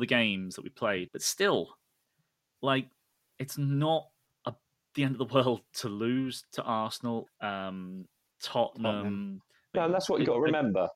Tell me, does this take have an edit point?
yes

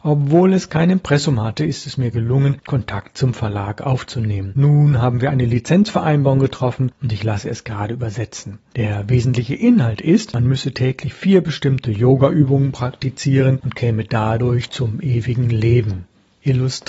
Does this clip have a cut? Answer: no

